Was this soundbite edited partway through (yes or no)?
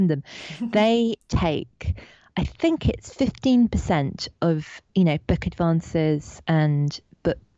no